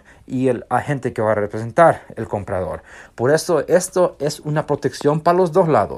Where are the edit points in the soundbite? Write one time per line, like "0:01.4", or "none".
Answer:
0:03.1